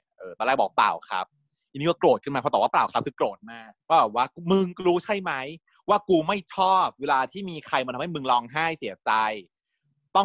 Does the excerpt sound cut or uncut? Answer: cut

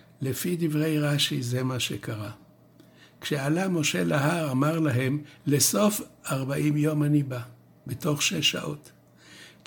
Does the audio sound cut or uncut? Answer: uncut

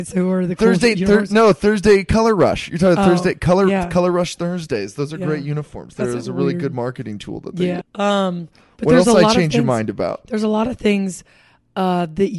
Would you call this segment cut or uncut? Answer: cut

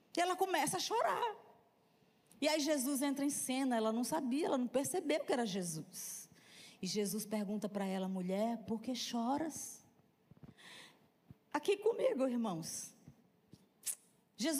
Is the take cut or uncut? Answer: uncut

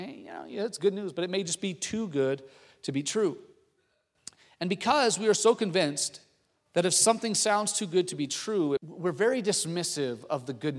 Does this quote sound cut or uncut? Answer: cut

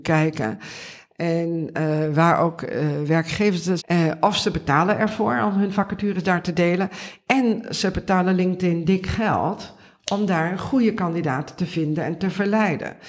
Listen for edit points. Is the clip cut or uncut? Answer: cut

